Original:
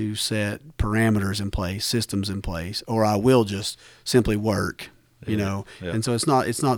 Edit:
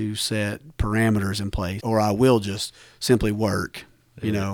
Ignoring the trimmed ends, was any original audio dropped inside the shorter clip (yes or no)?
yes